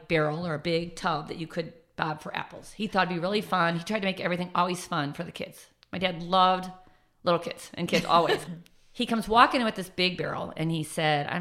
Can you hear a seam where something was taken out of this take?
yes; 1 cut; at 8.5 s

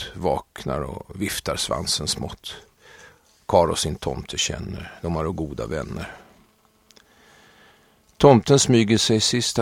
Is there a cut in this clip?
no; 0 cuts

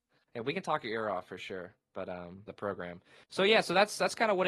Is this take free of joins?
no; 1 cut; at 2.5 s

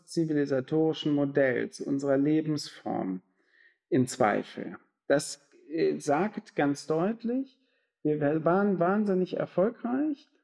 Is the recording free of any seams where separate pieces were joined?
yes; 0 cuts

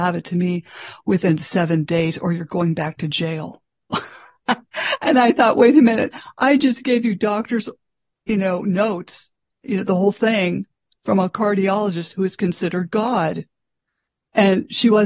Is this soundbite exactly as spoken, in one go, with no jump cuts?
yes; 0 cuts

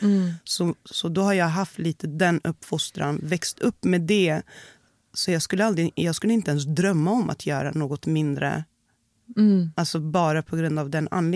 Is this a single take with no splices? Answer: yes; 0 cuts

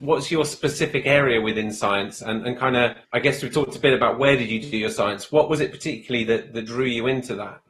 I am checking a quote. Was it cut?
yes; 1 cut; at 3.0 s

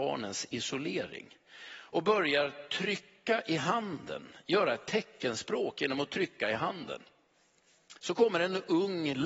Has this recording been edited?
yes; 1 cut; at 8.0 s

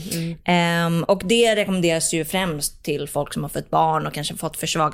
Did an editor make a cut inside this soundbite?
no; 0 cuts

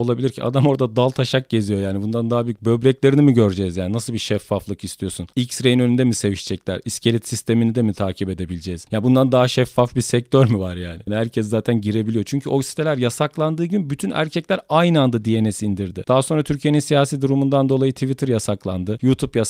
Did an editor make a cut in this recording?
yes; 1 cut; at 11.1 s

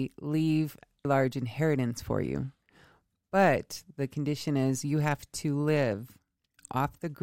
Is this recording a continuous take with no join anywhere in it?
no; 1 cut; at 1.0 s

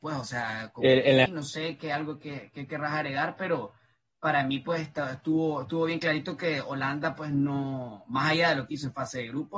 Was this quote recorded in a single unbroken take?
no; 1 cut; at 1.3 s

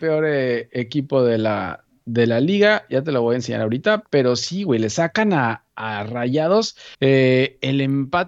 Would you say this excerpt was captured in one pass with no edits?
no; 1 cut; at 6.9 s

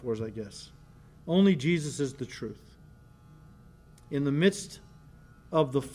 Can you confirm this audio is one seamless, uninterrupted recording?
yes; 0 cuts

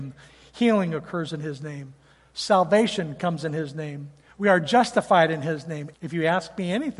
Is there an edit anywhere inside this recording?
yes; 2 cuts; at 4.3 s, 5.9 s

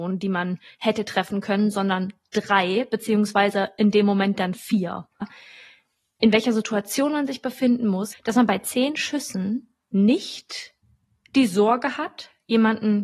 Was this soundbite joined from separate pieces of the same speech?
yes; 2 cuts; at 5.2 s, 9.8 s

